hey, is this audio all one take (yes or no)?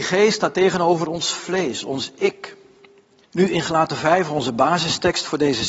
no